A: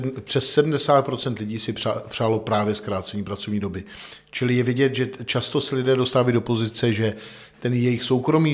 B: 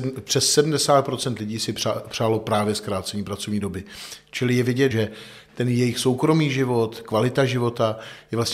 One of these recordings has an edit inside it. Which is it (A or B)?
B